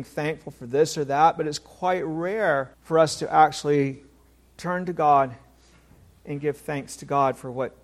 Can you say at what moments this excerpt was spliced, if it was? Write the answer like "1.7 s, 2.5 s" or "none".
2.7 s